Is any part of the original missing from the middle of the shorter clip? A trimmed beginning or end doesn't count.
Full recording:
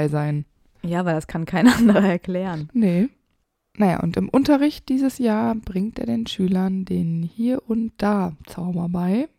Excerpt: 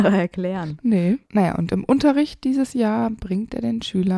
yes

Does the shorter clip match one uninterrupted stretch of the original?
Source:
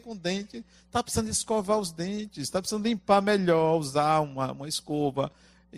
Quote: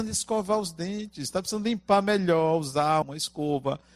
no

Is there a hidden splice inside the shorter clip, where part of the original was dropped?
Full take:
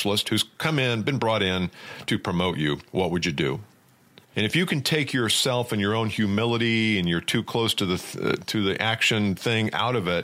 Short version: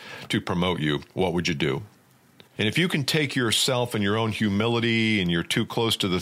no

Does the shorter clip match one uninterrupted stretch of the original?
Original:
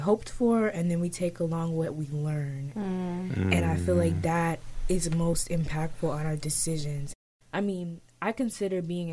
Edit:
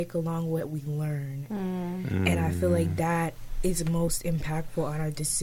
yes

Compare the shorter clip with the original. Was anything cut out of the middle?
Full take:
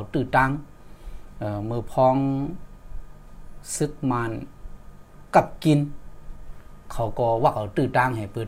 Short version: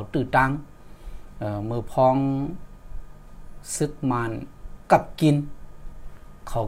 yes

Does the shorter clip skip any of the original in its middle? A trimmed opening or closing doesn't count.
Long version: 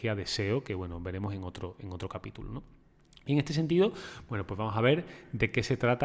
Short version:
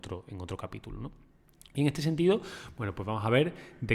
no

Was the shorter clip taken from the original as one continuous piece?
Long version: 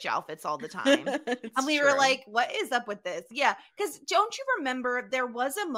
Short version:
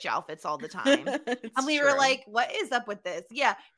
yes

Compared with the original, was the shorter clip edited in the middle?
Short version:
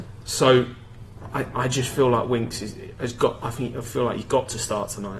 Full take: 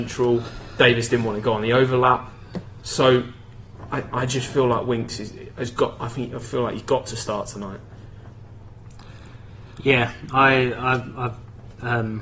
no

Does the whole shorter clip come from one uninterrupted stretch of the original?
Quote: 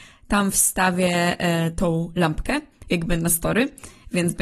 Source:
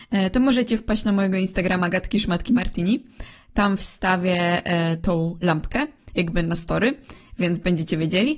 yes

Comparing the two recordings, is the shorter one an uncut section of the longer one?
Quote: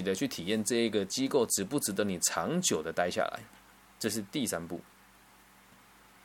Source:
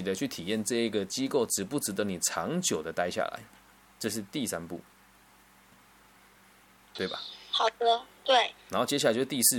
yes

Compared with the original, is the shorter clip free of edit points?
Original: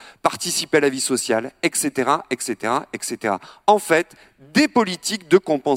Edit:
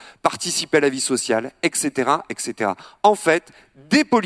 no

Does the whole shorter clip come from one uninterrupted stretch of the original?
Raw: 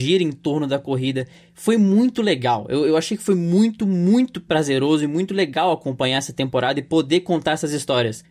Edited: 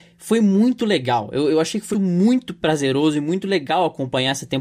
no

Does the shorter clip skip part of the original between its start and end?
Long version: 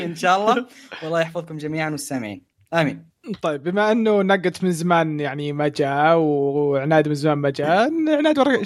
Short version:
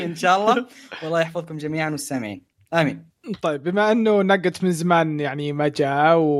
no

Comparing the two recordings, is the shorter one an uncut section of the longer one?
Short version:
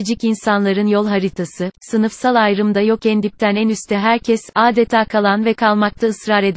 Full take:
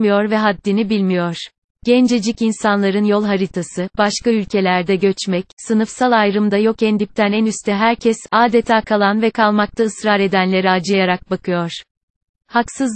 no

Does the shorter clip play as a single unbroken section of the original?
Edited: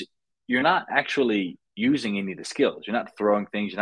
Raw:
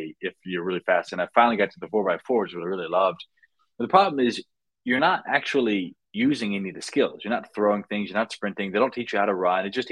yes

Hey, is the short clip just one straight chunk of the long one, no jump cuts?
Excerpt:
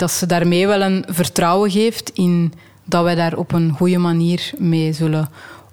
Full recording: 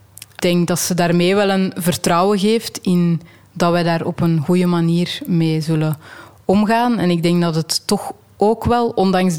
yes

